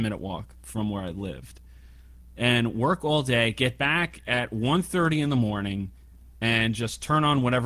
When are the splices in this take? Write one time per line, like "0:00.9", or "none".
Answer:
none